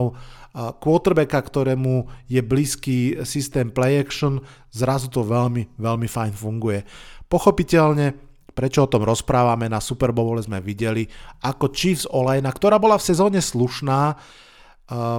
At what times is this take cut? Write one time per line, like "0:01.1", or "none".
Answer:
none